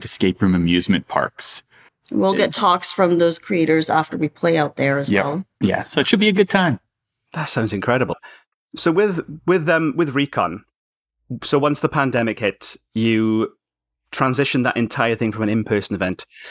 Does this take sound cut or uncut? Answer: uncut